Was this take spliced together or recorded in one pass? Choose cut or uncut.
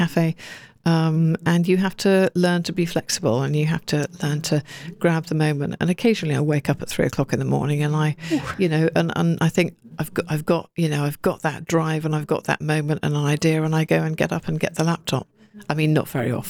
uncut